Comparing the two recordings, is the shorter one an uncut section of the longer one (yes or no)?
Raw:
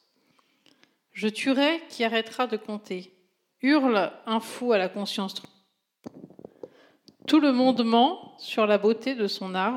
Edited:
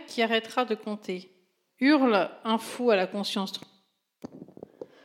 yes